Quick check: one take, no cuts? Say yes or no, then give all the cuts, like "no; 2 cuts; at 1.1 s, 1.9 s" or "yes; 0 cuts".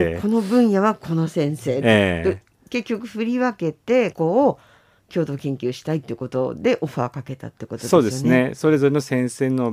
no; 1 cut; at 4.1 s